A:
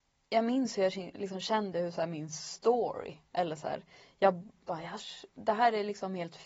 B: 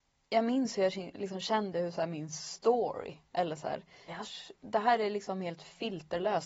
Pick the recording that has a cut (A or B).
B